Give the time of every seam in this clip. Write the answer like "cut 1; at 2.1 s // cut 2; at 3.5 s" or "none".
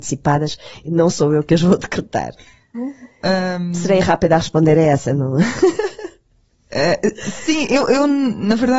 cut 1; at 2.7 s